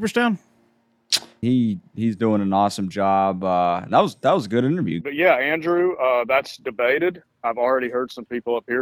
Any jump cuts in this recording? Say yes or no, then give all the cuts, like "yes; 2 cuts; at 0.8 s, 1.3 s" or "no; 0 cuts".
yes; 2 cuts; at 1.4 s, 5.0 s